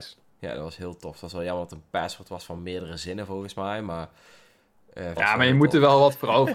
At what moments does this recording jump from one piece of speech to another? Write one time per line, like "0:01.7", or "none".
0:05.2